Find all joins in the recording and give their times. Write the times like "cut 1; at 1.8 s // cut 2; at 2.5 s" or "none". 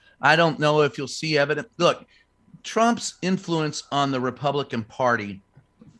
none